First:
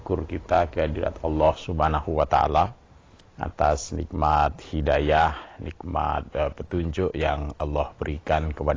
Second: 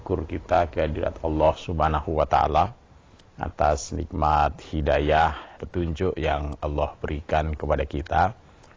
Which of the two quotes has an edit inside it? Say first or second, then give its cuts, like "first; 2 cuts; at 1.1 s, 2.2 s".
second; 1 cut; at 5.6 s